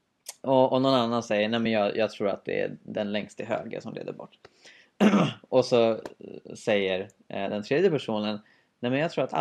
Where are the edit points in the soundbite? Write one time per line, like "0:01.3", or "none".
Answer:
none